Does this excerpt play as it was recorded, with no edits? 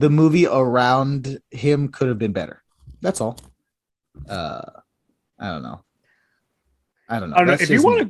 yes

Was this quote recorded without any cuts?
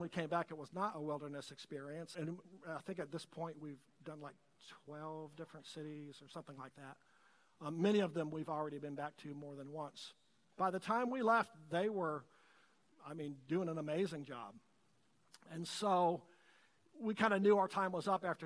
no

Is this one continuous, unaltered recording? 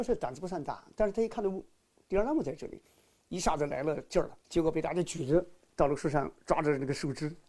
yes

